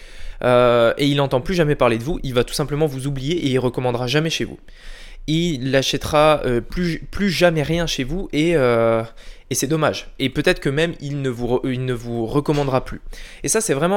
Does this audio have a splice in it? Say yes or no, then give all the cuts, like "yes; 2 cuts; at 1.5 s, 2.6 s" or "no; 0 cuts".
no; 0 cuts